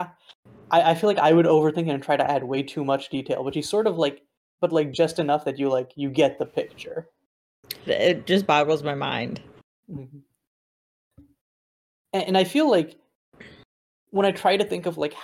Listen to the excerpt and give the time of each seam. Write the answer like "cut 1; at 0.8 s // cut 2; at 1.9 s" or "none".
cut 1; at 4.6 s // cut 2; at 7.9 s